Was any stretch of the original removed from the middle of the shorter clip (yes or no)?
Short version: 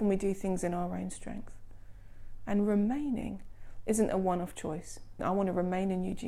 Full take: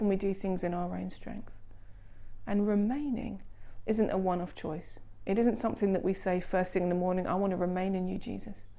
yes